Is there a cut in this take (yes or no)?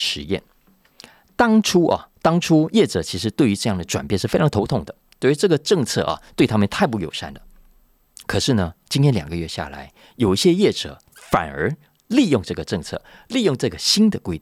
no